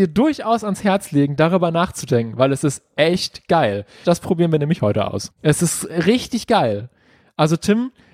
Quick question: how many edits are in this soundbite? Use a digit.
2